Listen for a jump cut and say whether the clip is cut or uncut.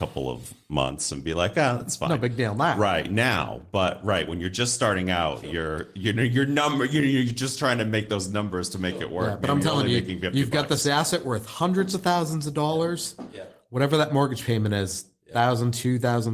uncut